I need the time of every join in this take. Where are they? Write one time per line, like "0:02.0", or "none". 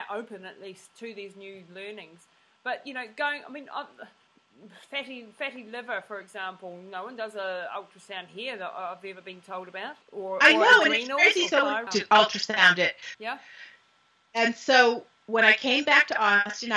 0:10.0
0:11.9
0:13.1